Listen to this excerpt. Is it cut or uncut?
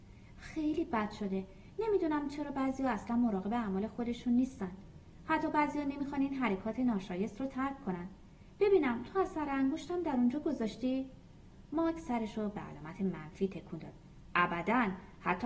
uncut